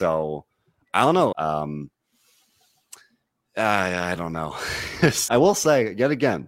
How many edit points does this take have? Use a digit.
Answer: 3